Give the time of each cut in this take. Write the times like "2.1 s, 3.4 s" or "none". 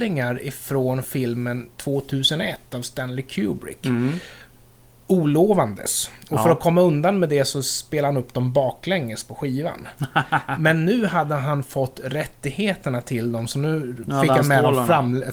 none